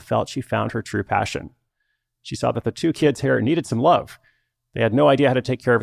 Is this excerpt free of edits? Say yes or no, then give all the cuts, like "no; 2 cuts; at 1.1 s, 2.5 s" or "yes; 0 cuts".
yes; 0 cuts